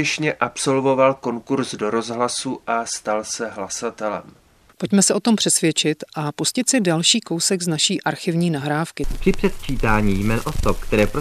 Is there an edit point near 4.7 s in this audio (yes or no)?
yes